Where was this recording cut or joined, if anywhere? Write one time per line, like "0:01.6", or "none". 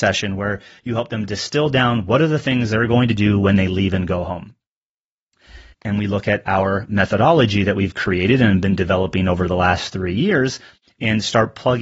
0:05.7